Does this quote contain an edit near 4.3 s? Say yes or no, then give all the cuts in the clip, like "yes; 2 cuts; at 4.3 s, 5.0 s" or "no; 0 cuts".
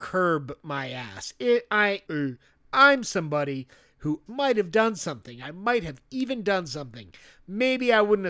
yes; 2 cuts; at 2.1 s, 4.3 s